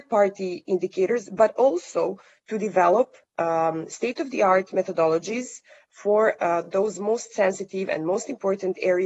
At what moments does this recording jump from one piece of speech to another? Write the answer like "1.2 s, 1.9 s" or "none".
none